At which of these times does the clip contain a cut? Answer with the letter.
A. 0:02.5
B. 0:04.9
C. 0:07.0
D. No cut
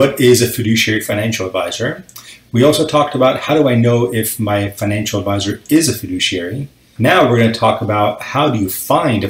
C